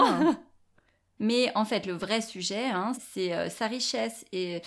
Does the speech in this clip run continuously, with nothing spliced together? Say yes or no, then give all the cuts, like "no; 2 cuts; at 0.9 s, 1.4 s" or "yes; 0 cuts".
no; 2 cuts; at 1.2 s, 2.9 s